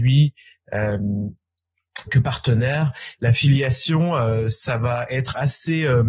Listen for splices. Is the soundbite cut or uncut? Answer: cut